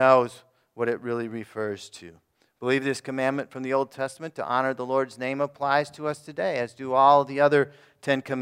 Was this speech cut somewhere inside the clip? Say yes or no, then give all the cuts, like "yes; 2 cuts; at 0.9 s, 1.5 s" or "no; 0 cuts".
yes; 1 cut; at 2.4 s